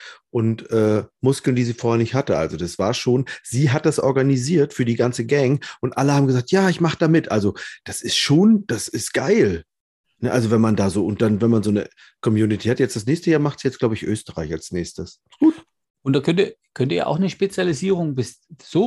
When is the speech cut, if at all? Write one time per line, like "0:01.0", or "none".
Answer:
none